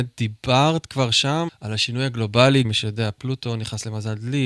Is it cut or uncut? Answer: cut